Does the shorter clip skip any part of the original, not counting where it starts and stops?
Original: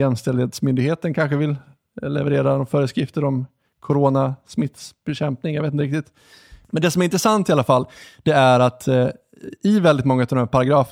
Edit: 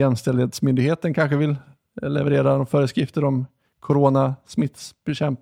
no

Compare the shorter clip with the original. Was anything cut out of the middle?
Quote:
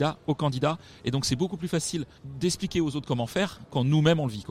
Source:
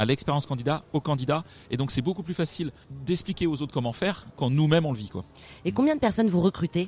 no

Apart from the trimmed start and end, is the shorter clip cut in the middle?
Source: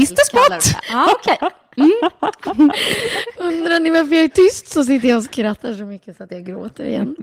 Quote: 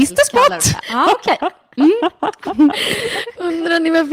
no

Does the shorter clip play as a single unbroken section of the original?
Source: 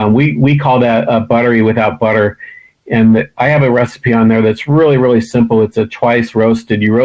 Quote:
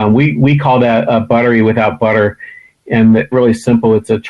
no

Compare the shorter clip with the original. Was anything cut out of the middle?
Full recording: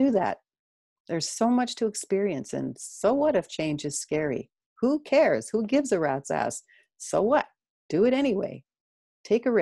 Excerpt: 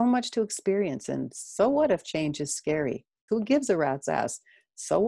yes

